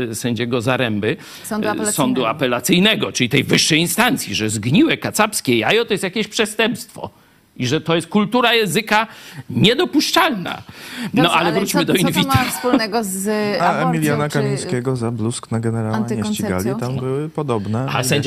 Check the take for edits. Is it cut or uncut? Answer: uncut